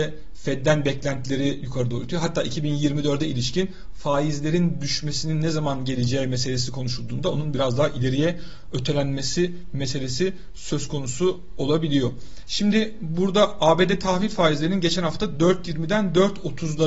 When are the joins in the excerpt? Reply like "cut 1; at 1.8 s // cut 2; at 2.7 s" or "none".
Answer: none